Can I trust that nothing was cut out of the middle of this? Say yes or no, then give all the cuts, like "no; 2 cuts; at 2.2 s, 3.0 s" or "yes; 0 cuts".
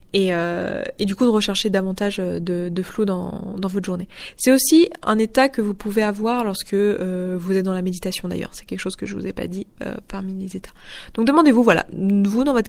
yes; 0 cuts